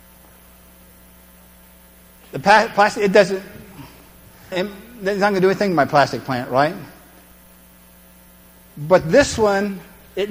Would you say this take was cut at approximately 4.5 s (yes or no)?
yes